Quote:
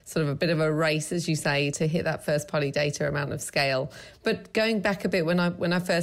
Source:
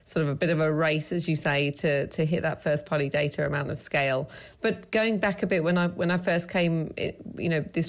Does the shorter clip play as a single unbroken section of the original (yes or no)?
no